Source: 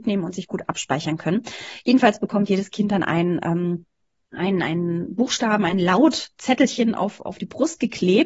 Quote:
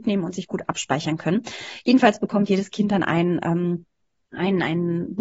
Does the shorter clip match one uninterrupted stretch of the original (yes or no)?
yes